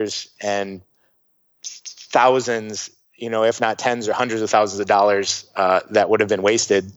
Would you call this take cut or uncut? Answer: uncut